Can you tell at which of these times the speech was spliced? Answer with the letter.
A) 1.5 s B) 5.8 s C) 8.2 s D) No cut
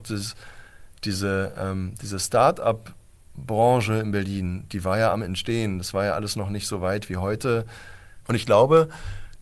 C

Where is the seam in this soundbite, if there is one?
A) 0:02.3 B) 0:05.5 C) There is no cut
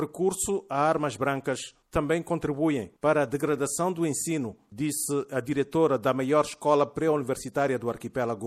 C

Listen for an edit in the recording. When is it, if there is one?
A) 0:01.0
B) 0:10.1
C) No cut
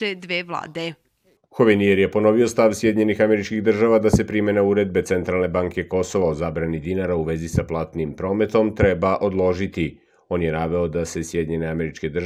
C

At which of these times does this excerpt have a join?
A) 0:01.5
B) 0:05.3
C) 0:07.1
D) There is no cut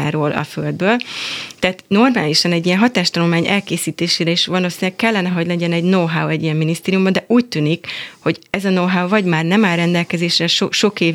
D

